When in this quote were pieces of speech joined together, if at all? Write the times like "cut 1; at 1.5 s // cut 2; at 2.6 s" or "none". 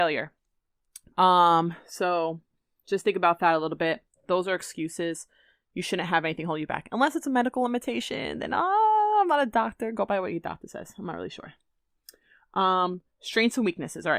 cut 1; at 1.1 s